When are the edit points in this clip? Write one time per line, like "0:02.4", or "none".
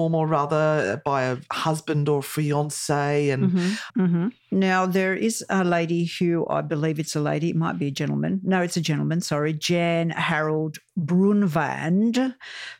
0:03.9

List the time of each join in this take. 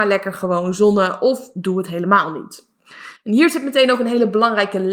none

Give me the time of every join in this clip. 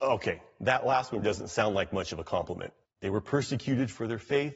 0:01.2
0:02.9

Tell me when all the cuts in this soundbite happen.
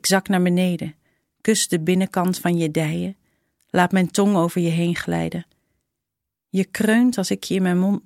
none

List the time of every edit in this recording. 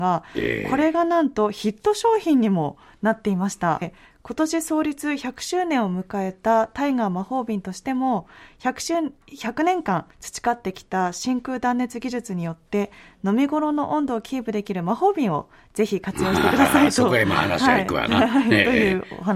0:03.8

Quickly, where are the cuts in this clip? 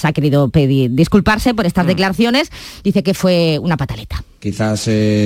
none

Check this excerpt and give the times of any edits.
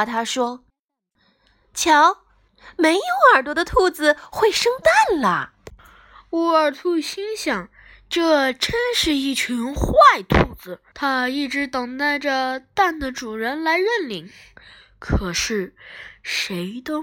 0:10.9

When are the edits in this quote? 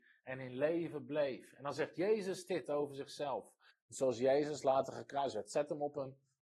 0:03.7

